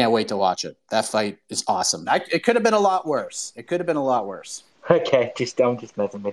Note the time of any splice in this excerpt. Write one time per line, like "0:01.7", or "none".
0:02.0